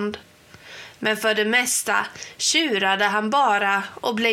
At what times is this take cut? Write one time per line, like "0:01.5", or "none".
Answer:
none